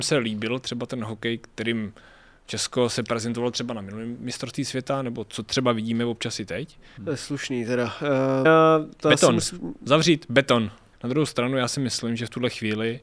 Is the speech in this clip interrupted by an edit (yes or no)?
yes